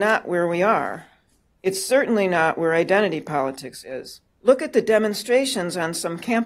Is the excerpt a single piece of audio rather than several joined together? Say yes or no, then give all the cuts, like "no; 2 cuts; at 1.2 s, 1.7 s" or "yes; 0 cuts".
no; 1 cut; at 4.4 s